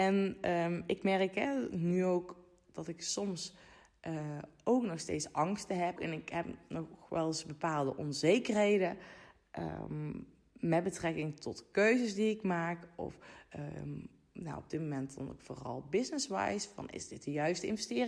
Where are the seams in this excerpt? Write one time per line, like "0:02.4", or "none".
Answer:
0:06.0